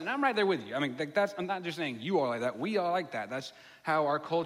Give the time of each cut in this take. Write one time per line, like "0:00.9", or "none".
none

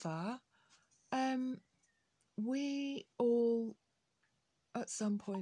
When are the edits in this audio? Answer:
0:03.1

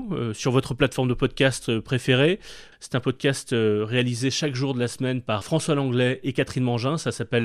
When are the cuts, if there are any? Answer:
0:02.7
0:05.4

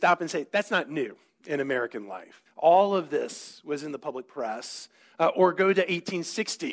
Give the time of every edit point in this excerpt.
0:02.5
0:05.1

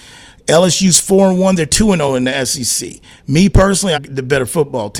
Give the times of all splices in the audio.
0:03.9

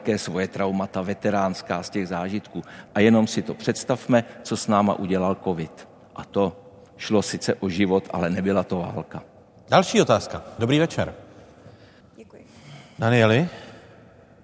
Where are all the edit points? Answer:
0:02.9
0:12.0

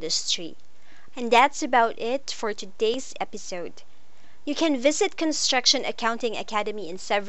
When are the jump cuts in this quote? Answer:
0:01.1

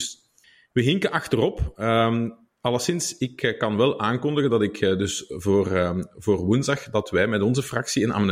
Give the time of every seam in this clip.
none

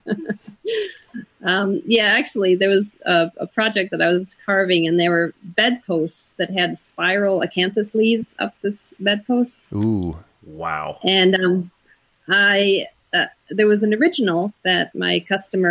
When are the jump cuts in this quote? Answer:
none

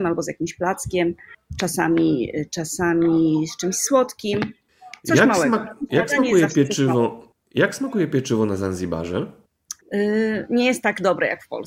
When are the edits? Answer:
0:09.8

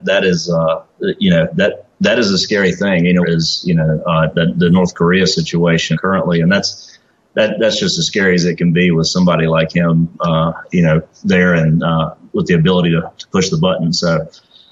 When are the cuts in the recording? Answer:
0:03.2
0:05.9

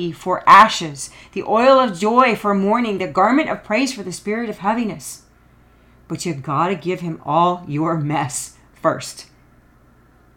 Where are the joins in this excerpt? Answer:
none

